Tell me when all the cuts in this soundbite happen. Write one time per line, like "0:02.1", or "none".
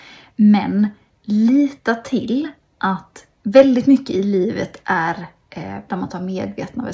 0:01.1
0:03.3
0:05.9